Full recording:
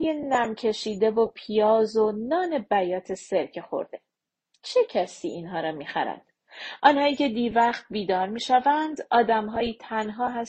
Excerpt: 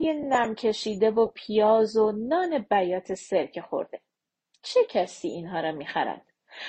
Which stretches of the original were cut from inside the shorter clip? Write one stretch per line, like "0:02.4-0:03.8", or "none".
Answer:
none